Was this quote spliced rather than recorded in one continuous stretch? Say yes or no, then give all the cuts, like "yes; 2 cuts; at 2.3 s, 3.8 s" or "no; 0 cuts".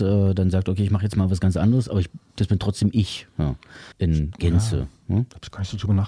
yes; 1 cut; at 3.9 s